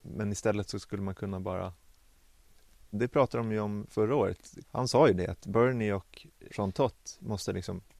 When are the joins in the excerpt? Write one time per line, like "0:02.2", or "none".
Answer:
0:02.9
0:04.6
0:06.5